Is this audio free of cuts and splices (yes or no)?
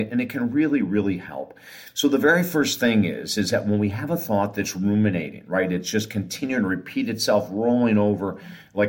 yes